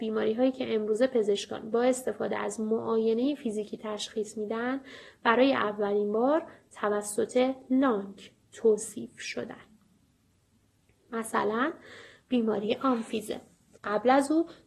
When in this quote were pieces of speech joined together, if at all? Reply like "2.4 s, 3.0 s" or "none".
13.7 s